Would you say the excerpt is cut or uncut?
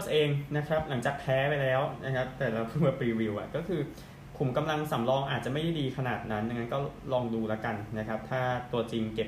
uncut